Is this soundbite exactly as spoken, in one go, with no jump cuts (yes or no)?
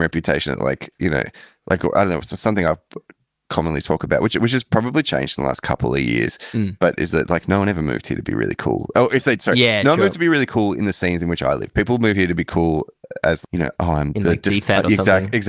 no